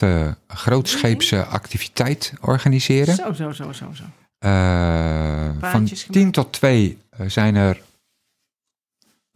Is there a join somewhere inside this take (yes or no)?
no